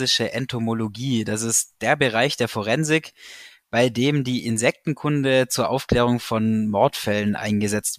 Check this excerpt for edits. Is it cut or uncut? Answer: uncut